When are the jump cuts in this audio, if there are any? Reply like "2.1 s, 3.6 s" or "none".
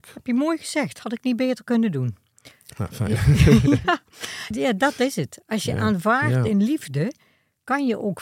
4.5 s